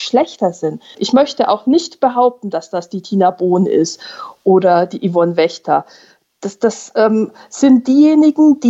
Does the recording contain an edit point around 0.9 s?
yes; 1 cut; at 0.9 s

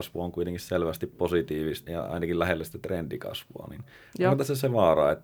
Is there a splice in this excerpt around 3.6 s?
no; 1 cut; at 1.9 s

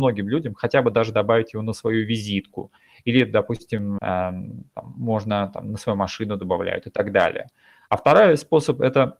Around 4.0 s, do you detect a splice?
yes; 1 cut; at 4.0 s

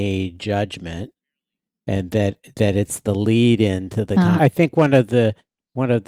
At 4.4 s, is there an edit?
yes; 1 cut; at 4.4 s

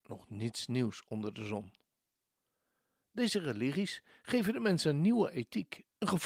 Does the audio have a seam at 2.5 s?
no; 0 cuts

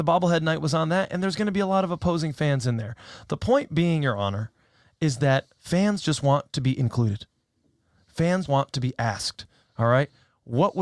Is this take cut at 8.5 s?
yes; 1 cut; at 8.5 s

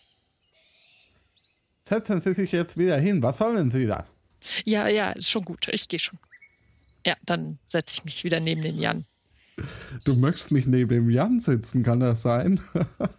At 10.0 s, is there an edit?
yes; 1 cut; at 10.0 s

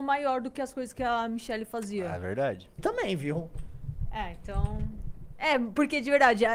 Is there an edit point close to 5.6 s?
no; 1 cut; at 2.8 s

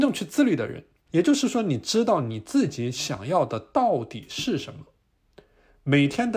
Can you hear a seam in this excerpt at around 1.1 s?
yes; 1 cut; at 1.1 s

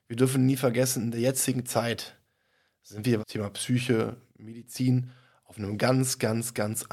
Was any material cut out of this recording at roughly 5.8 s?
no; 1 cut; at 3.2 s

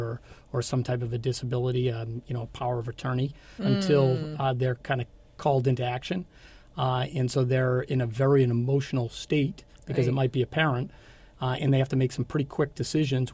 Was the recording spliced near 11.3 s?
no; 1 cut; at 3.6 s

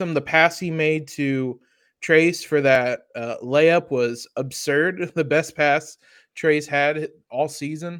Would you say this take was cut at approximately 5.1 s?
no; 0 cuts

